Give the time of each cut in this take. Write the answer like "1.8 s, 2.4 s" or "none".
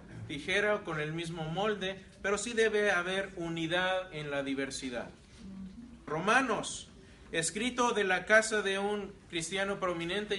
6.1 s